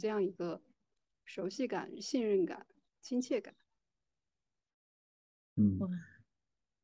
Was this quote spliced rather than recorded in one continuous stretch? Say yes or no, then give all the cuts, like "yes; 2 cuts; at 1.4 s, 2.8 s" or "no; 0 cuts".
no; 0 cuts